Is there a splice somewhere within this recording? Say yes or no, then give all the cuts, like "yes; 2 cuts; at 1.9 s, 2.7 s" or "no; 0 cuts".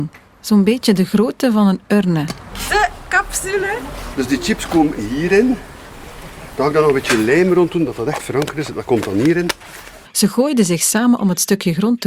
yes; 2 cuts; at 4.1 s, 10.0 s